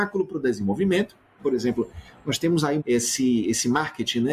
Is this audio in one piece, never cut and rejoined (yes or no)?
no